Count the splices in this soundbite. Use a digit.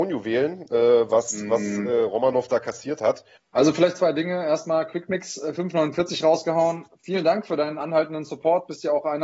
1